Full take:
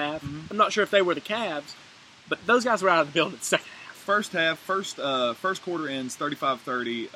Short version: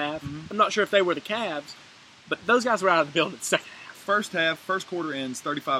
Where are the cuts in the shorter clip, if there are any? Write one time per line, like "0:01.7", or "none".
0:04.6

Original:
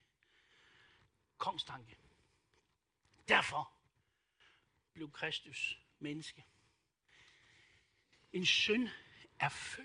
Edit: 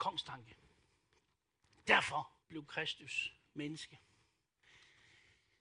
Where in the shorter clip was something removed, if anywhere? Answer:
0:02.4

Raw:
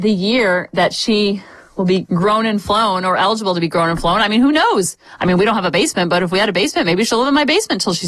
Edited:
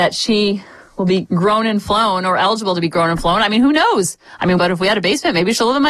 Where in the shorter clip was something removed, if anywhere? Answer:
0:04.6

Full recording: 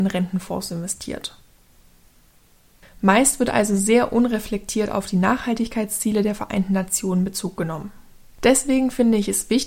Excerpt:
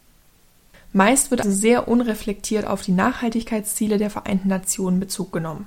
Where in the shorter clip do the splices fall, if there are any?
0:01.4

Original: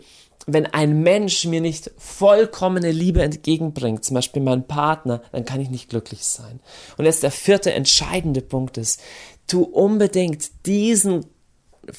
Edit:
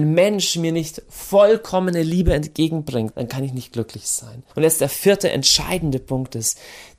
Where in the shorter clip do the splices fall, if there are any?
0:03.1
0:04.5

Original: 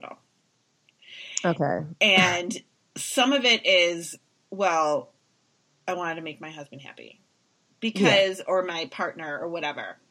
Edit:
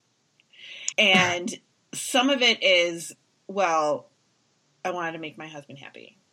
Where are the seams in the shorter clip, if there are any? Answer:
0:00.9

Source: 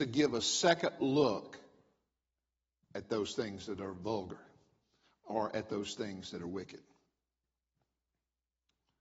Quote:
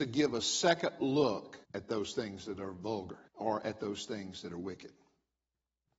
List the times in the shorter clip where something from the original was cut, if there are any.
0:01.6
0:03.3

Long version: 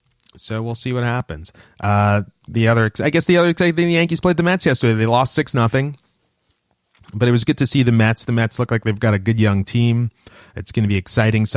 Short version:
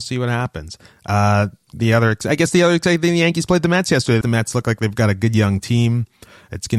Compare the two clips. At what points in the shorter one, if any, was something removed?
0:04.2

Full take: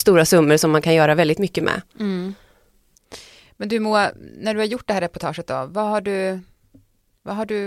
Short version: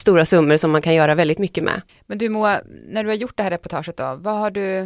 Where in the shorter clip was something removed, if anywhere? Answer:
0:01.9

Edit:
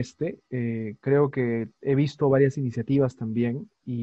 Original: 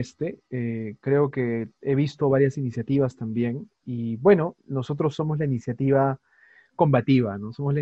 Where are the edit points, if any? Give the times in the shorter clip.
none

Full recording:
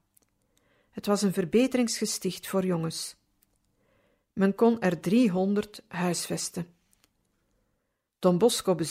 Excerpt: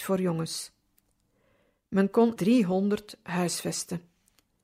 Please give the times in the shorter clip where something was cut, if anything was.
0:02.4

